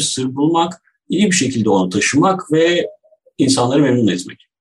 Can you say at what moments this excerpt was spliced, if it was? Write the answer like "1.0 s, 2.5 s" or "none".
none